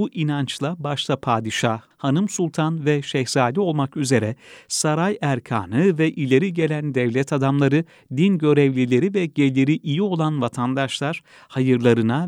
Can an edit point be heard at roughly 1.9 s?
yes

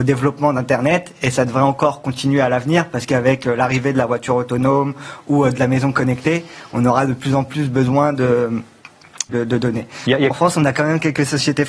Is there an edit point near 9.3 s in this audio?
yes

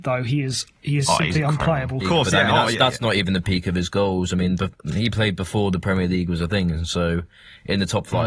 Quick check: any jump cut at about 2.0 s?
yes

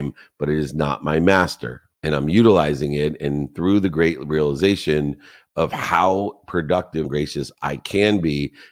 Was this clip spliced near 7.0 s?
yes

